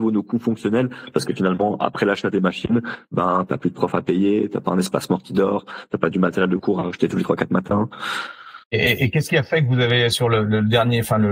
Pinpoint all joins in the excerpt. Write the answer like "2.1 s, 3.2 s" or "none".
8.6 s